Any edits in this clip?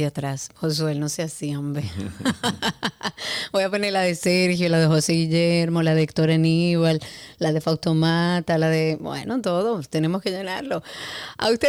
no; 0 cuts

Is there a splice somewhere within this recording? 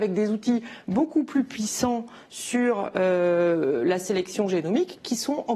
no; 0 cuts

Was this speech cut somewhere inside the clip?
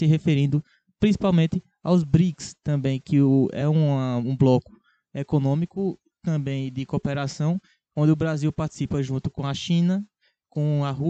no; 0 cuts

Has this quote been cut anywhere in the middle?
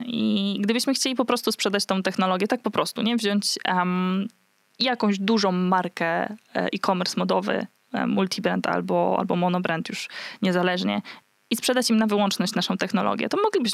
no; 0 cuts

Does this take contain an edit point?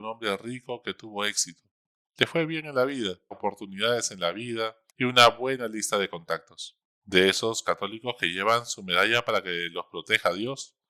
yes; 2 cuts; at 3.3 s, 6.9 s

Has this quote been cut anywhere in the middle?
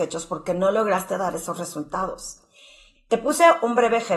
yes; 1 cut; at 2.9 s

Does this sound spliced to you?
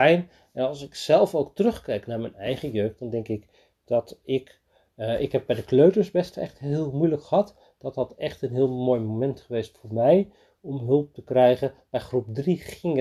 no; 0 cuts

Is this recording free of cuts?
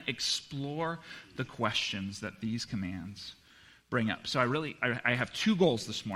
yes; 0 cuts

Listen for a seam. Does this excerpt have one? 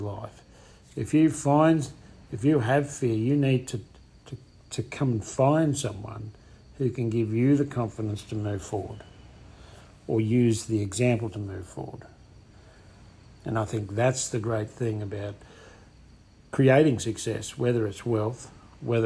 no; 0 cuts

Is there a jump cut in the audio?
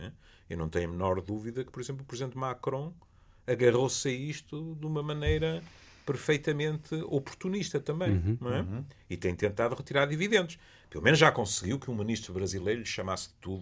no; 0 cuts

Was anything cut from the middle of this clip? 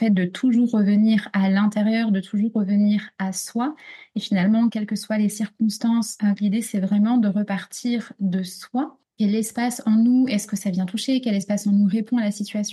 yes; 2 cuts; at 4.7 s, 6.4 s

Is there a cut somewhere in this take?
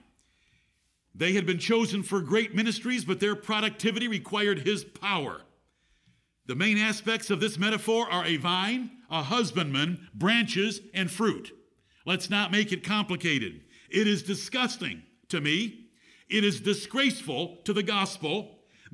no; 0 cuts

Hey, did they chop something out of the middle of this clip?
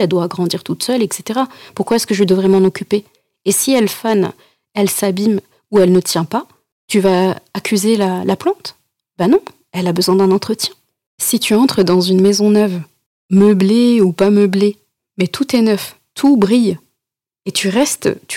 yes; 2 cuts; at 11.1 s, 16.1 s

